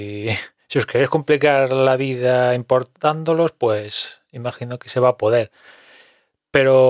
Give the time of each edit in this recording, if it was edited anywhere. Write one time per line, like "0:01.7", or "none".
none